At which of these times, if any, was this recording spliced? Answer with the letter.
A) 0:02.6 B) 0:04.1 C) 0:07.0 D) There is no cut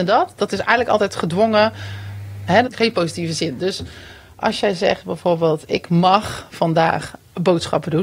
A